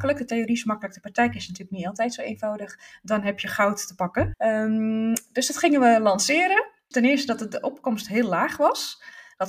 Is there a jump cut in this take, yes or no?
yes